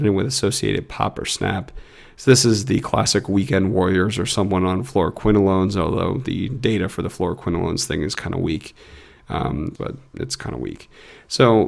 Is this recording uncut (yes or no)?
no